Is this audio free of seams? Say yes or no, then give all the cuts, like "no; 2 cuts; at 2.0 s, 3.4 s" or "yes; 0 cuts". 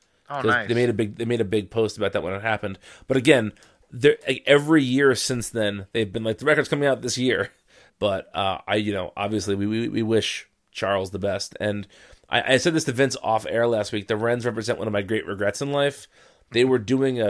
no; 1 cut; at 7.9 s